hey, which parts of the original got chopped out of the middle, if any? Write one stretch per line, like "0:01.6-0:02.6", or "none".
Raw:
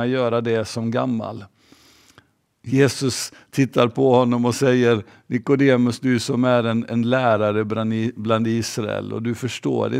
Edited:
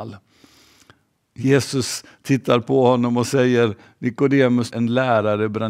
0:06.0-0:06.9